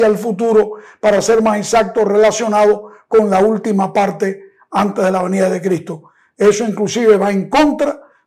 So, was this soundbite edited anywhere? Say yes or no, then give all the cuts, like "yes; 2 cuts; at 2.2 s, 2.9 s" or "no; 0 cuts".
no; 0 cuts